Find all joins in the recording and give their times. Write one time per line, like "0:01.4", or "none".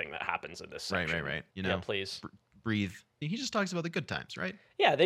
0:01.5
0:03.2